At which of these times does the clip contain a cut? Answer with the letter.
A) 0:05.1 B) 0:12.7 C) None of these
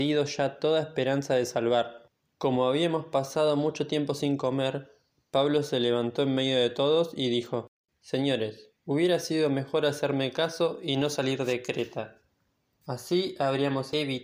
C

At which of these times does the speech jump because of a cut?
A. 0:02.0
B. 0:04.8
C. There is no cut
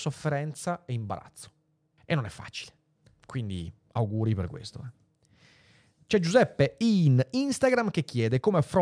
A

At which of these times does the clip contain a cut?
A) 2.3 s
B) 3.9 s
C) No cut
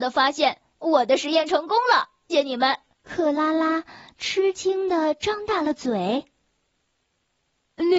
A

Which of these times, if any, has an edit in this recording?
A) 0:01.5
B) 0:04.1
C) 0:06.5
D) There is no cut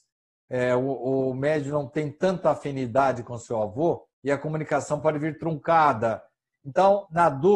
B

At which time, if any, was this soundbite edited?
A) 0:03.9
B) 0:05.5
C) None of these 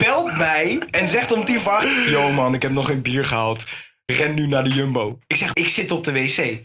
B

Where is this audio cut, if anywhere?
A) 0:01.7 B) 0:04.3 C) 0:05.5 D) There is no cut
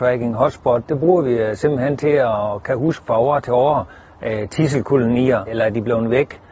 C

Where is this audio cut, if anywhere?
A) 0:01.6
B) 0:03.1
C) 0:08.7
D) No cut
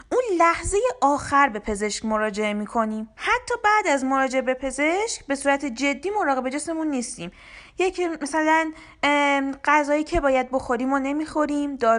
B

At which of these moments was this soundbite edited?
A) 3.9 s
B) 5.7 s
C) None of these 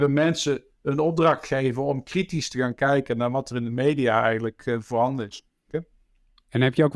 B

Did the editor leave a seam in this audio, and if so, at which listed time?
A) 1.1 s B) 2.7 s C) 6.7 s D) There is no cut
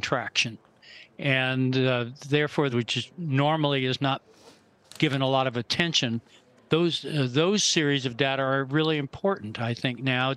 B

